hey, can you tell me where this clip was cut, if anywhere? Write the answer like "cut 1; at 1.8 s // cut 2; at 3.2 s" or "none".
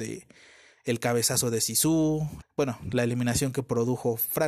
cut 1; at 2.4 s

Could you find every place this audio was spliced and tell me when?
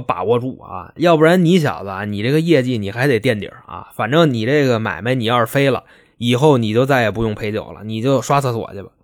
none

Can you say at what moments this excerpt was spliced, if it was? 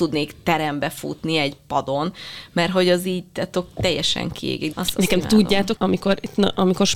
cut 1; at 4.7 s // cut 2; at 5.8 s

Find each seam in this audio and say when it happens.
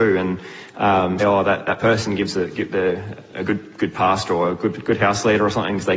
cut 1; at 1.2 s

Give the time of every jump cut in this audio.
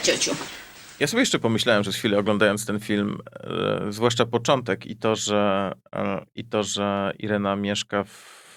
none

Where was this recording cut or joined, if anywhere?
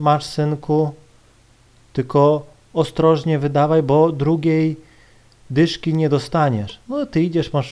none

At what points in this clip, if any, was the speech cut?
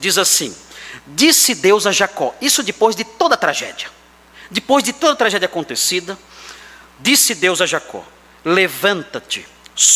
none

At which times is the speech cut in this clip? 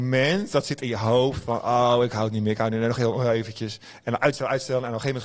none

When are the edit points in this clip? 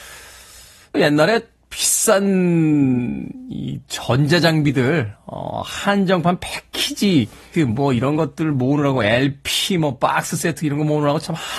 cut 1; at 0.9 s // cut 2; at 7.5 s

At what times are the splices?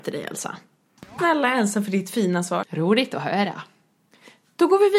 cut 1; at 1.2 s // cut 2; at 2.6 s

